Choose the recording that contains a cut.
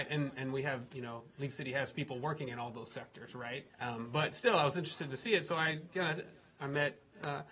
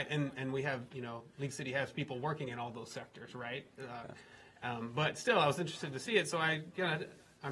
first; 1 cut; at 3.7 s

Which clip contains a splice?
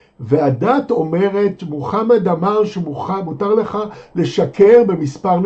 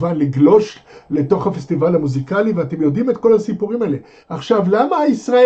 second; 1 cut; at 4.2 s

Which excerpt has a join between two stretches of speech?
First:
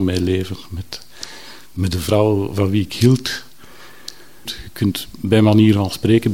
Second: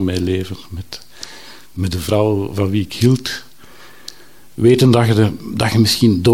first; 1 cut; at 4.4 s

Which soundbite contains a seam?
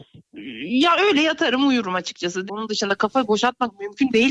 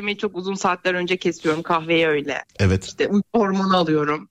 first; 1 cut; at 2.5 s

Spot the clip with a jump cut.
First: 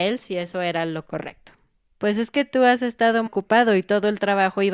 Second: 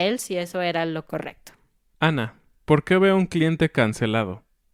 first; 2 cuts; at 1.8 s, 3.3 s

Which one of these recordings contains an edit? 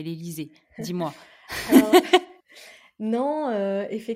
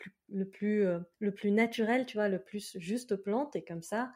second; 1 cut; at 1.1 s

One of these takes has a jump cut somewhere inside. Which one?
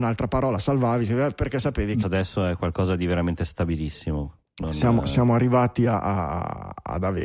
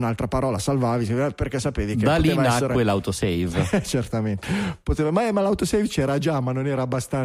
first; 1 cut; at 2.0 s

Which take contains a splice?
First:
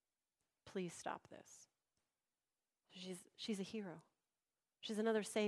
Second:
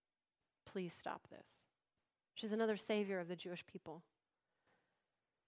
second; 1 cut; at 2.3 s

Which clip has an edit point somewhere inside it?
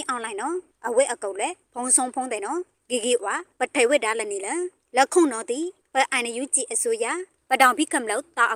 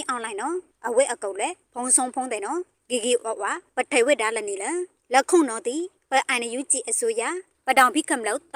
first; 1 cut; at 3.2 s

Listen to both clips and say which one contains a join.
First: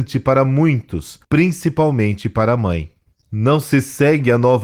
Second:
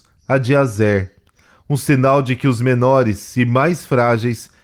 first; 1 cut; at 1.2 s

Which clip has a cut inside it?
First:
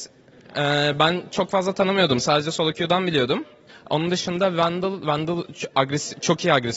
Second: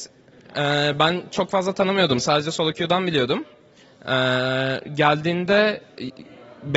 first; 1 cut; at 3.7 s

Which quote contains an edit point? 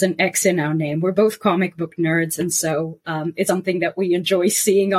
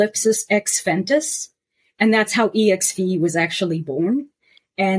first; 1 cut; at 3.5 s

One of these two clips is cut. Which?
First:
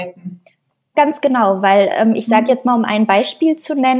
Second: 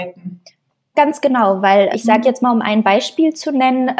second; 1 cut; at 1.9 s

